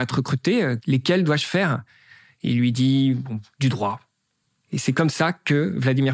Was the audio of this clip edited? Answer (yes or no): no